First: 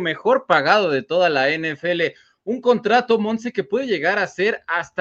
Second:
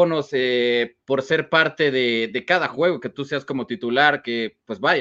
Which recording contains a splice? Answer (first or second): second